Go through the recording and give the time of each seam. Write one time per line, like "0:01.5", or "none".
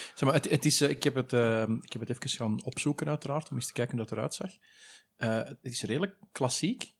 none